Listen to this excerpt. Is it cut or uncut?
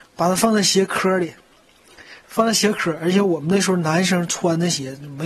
uncut